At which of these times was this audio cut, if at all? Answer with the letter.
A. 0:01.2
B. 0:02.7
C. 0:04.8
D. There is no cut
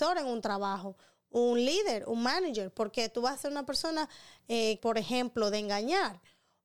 C